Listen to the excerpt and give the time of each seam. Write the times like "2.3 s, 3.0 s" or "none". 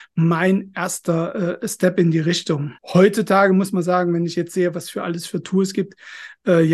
2.8 s